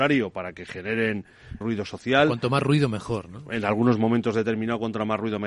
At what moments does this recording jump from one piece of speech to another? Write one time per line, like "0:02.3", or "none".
0:01.6